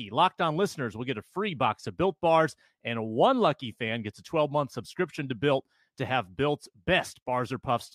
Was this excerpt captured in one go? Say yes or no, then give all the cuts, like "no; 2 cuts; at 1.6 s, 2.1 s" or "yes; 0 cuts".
yes; 0 cuts